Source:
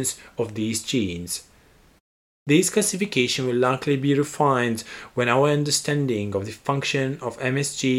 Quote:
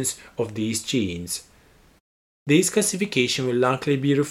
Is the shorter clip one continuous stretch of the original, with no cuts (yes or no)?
yes